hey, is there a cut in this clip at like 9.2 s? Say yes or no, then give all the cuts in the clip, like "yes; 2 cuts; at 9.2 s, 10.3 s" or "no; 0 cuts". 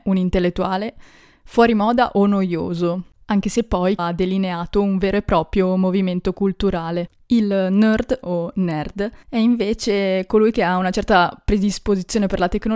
yes; 2 cuts; at 4.0 s, 9.2 s